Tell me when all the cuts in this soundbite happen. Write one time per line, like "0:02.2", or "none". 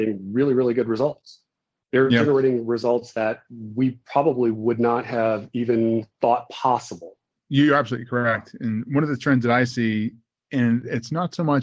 none